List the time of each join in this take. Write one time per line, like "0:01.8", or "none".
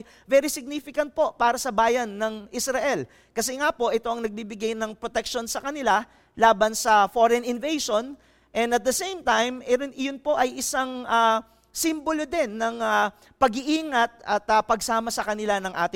none

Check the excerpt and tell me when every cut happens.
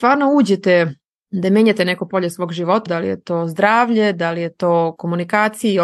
0:02.9

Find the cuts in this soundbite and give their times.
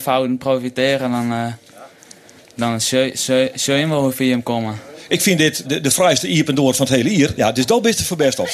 0:05.6
0:07.3

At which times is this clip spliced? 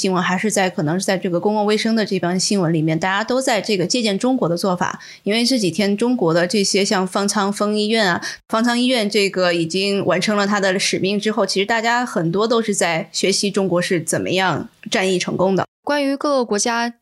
none

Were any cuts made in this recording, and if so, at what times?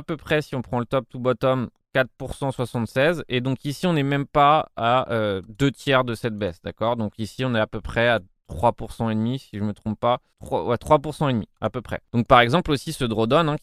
none

